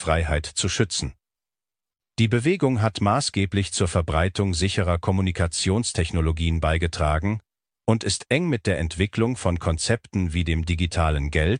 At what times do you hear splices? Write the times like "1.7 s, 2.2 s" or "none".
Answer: none